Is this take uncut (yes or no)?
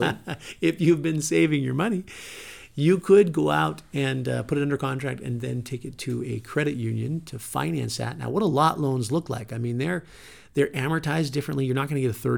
yes